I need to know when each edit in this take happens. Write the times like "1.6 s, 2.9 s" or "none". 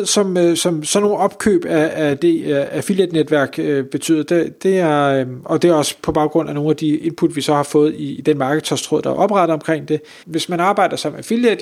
10.2 s